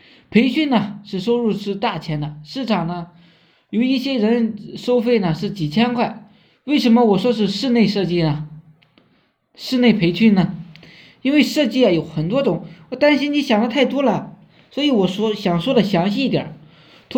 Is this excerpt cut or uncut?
uncut